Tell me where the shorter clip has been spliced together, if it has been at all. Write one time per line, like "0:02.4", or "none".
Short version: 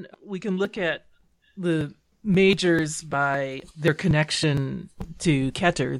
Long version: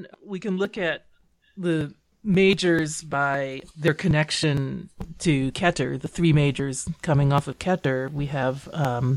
none